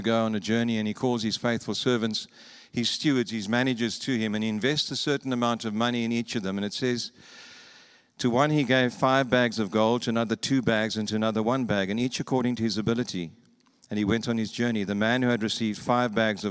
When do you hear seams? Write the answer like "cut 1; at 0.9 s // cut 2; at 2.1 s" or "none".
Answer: none